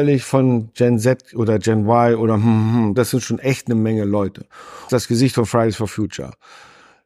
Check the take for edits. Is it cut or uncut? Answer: cut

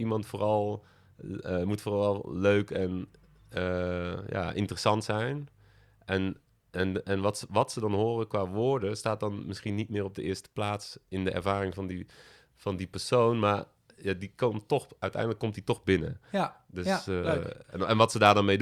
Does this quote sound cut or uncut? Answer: uncut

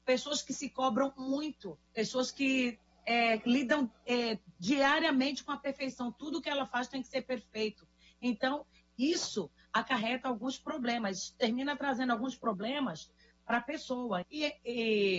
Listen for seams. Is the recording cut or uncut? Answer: cut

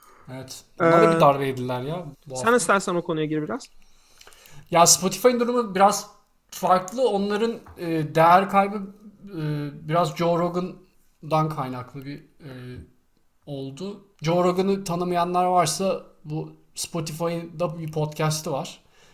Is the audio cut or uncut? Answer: cut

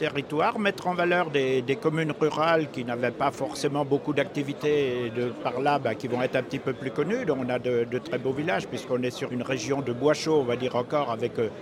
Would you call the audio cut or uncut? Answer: cut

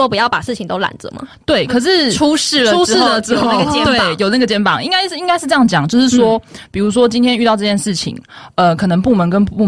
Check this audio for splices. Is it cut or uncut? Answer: uncut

